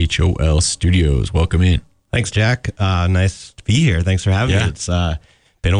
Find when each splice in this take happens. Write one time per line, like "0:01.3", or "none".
none